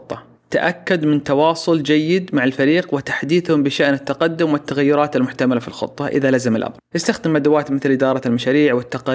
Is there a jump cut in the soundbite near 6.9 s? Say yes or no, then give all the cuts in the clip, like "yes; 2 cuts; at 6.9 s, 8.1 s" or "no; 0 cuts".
yes; 1 cut; at 6.9 s